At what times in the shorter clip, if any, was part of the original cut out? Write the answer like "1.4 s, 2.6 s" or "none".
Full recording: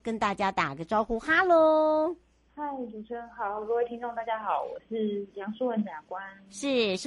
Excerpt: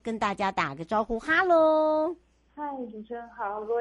none